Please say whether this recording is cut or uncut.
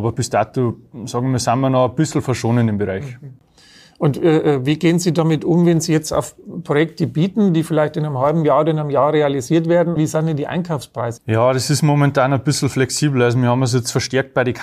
cut